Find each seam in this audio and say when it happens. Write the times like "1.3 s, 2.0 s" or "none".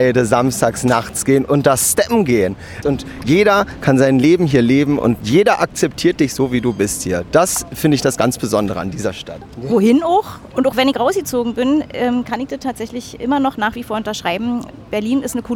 2.8 s, 9.4 s, 10.5 s